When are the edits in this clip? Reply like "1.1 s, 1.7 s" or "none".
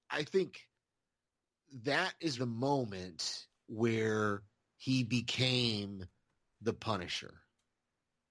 2.4 s